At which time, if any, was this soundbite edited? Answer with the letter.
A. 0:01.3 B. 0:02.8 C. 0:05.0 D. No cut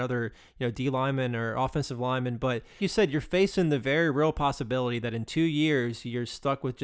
B